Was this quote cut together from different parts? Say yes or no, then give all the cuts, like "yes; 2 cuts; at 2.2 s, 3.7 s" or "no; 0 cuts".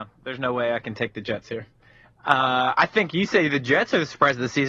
no; 0 cuts